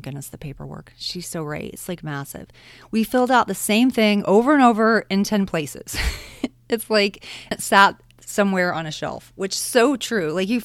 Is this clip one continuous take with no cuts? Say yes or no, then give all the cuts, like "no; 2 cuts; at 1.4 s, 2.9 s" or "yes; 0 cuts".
no; 1 cut; at 7.5 s